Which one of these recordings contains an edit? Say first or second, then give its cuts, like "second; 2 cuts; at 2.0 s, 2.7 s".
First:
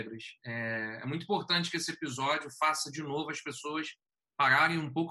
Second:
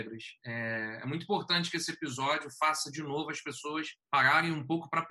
second; 1 cut; at 4.0 s